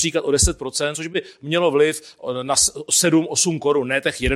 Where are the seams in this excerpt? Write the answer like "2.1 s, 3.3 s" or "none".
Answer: none